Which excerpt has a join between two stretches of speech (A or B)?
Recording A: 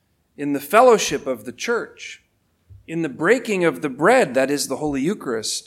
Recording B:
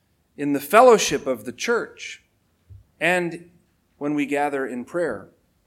B